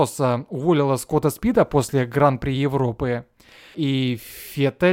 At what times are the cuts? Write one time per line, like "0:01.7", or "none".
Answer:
0:03.7